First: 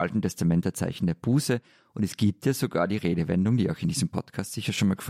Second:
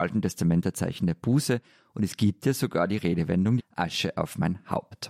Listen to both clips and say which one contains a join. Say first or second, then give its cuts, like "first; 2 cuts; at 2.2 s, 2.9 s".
second; 1 cut; at 3.6 s